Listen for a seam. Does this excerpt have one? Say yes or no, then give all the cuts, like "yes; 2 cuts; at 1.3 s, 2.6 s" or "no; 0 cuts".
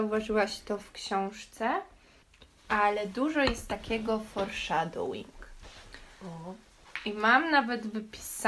no; 0 cuts